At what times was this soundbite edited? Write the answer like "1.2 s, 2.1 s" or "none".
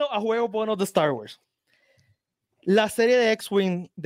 none